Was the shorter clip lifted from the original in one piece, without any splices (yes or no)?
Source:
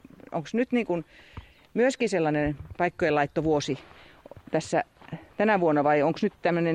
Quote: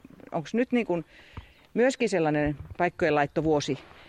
yes